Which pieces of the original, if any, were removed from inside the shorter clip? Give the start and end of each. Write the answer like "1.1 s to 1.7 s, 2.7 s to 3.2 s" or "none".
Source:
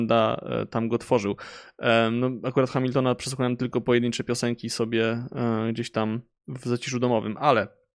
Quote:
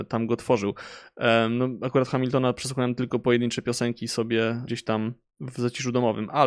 5.3 s to 5.7 s